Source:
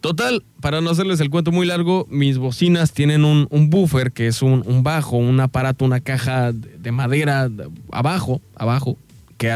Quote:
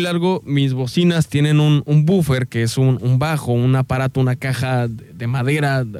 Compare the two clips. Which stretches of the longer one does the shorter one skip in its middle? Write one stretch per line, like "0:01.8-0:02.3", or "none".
none

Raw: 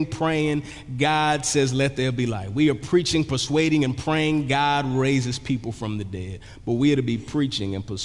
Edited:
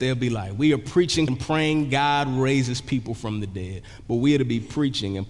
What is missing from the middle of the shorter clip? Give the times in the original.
0:03.2-0:03.9

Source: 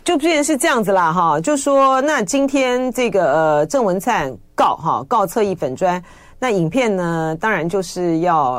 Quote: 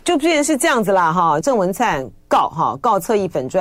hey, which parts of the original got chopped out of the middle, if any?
0:01.4-0:03.7

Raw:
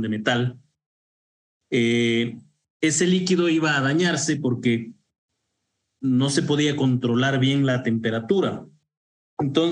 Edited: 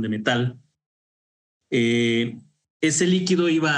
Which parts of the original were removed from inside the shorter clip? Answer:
none

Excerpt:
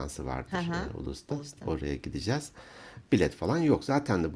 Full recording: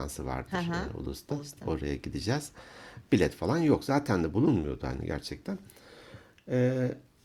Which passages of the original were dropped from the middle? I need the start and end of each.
none

